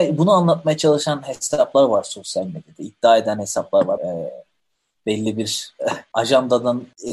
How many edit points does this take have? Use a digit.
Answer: 1